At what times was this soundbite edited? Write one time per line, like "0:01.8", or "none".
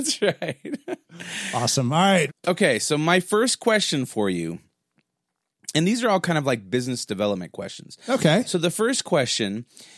0:02.3